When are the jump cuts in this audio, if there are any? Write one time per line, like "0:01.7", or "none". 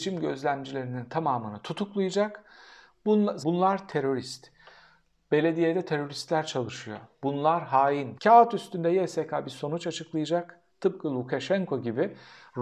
0:03.4
0:08.2